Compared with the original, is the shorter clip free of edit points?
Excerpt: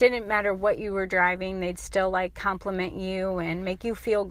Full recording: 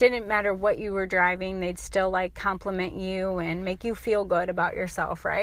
yes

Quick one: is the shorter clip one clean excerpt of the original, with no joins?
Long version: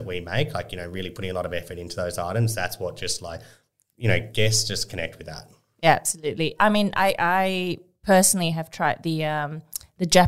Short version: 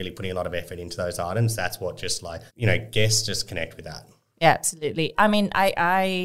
no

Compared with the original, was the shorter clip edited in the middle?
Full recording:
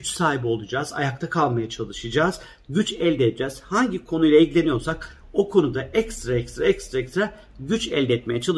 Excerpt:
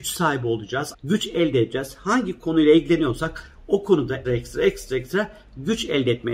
yes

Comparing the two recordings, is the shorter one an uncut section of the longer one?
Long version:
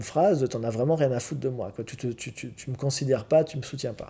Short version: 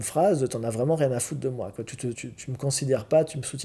no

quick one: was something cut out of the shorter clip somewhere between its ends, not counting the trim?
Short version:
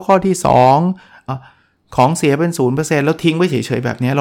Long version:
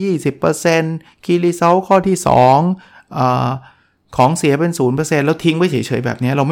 yes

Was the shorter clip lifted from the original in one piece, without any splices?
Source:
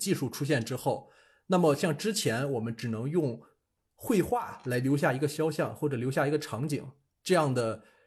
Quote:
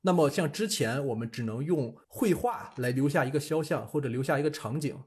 no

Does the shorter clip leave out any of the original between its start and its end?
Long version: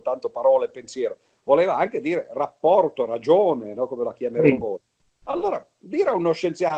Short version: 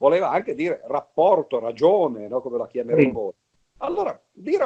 no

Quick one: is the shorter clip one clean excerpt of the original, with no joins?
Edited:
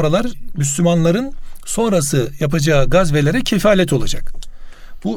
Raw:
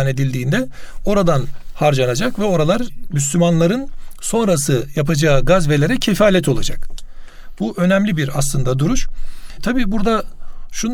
yes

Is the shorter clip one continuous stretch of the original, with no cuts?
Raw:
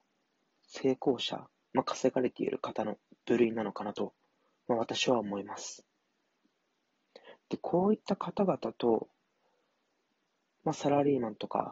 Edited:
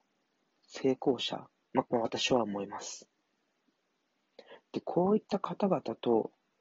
no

